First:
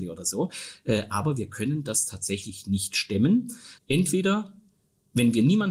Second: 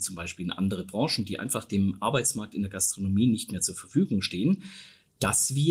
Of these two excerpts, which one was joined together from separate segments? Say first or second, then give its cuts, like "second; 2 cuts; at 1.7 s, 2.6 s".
first; 1 cut; at 3.8 s